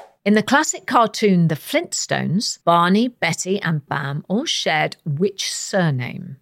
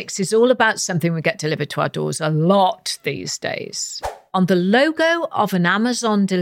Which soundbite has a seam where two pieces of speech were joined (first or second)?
first